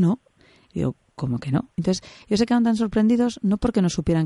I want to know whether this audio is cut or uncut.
cut